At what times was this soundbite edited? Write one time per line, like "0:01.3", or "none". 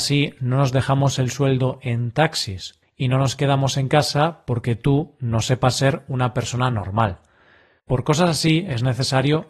0:02.8